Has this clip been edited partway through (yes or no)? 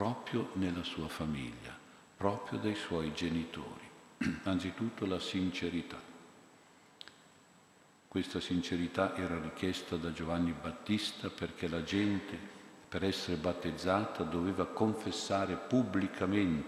no